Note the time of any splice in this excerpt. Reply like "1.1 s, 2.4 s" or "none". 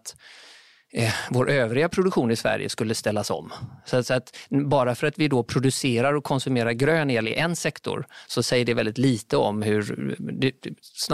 none